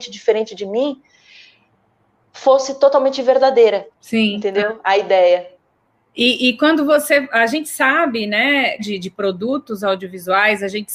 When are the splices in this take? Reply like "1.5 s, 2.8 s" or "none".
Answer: 3.9 s, 8.8 s